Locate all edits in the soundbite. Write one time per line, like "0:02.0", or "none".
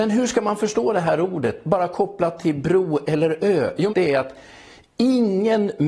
0:03.9